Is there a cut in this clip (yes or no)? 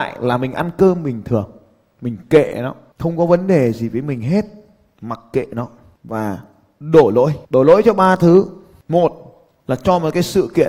yes